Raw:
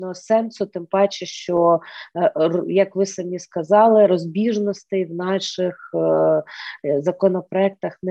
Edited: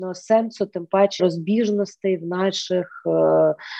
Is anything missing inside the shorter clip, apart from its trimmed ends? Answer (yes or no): yes